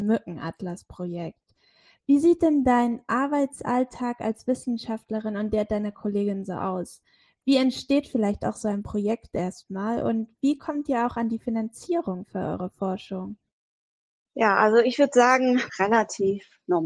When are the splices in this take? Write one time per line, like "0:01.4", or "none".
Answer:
0:15.7

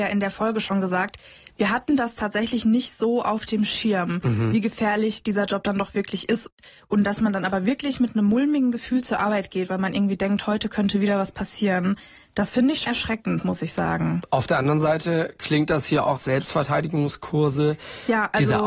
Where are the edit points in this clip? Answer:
0:12.8
0:16.2

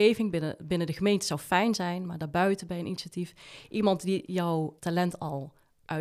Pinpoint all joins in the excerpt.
0:04.8

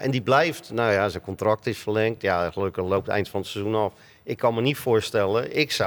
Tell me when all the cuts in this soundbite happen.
none

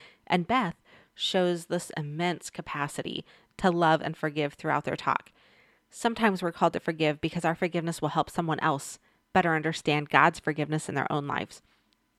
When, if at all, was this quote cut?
0:01.0
0:05.8

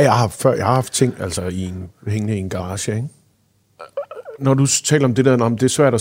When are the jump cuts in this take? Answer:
none

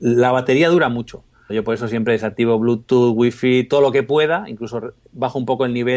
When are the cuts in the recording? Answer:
0:01.5

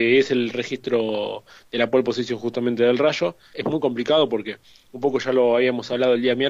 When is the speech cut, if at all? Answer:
0:03.5

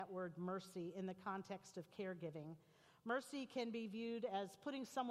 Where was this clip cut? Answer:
none

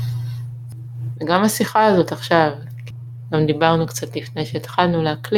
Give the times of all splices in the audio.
0:01.2

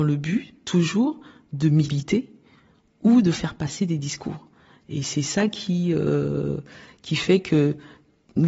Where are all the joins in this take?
0:04.7

